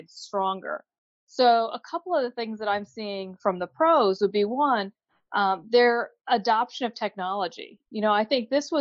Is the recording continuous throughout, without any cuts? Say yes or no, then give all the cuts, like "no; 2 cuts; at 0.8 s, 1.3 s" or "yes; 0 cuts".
yes; 0 cuts